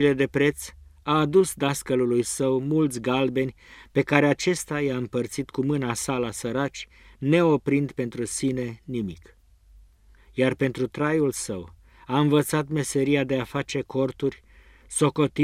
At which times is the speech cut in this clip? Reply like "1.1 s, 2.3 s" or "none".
none